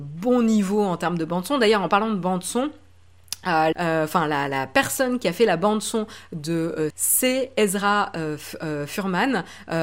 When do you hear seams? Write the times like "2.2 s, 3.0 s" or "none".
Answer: 3.7 s, 6.9 s